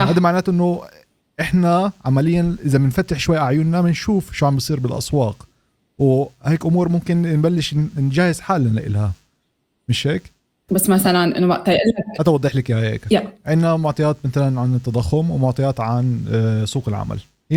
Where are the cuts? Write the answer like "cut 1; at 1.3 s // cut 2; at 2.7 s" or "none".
cut 1; at 10.7 s